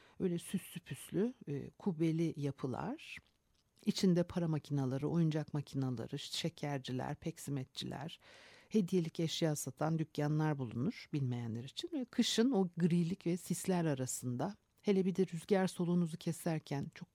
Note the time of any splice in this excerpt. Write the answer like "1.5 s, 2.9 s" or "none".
none